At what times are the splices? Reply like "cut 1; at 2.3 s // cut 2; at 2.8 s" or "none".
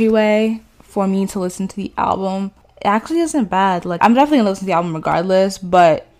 cut 1; at 4.0 s